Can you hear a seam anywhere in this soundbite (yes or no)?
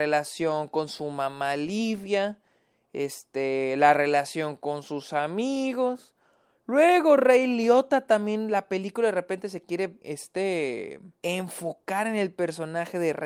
yes